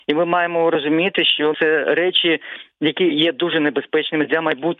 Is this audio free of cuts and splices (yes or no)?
no